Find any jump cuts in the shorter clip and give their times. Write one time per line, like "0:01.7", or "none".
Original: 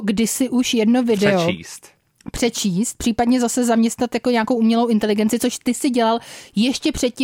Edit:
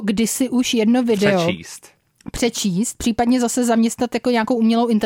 none